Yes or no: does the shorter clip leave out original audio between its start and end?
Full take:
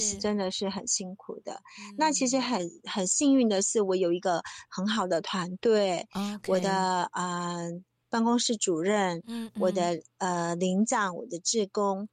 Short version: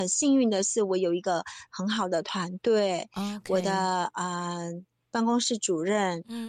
no